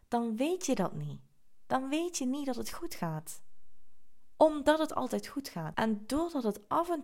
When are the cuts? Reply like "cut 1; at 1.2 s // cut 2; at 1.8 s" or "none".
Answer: cut 1; at 5.7 s